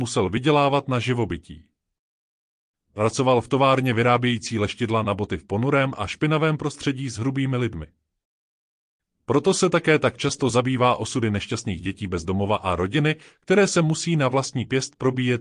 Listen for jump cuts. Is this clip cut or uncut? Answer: uncut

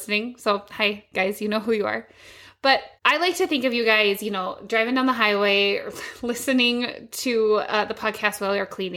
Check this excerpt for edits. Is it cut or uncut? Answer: cut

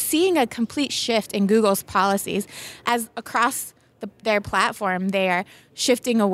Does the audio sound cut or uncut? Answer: uncut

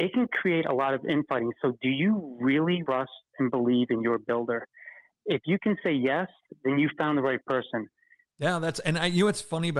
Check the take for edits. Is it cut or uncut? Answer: cut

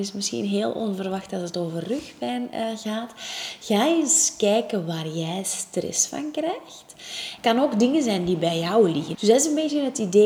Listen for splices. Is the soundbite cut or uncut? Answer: cut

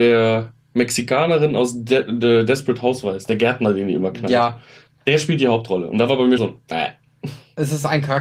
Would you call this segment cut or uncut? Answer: cut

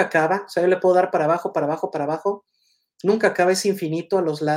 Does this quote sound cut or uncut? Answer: uncut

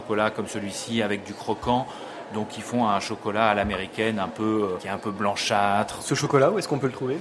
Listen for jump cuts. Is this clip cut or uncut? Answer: cut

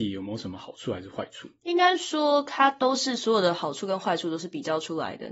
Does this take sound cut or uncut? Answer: uncut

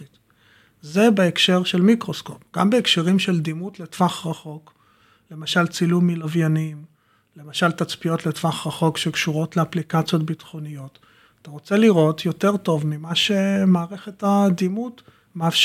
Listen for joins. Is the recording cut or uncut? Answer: uncut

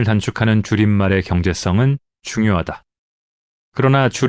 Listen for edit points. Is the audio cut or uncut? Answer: uncut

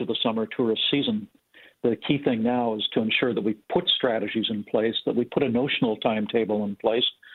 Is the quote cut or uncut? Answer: uncut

